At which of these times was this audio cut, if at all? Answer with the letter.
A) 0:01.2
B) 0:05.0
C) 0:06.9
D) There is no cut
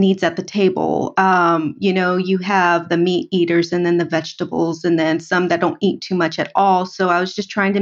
D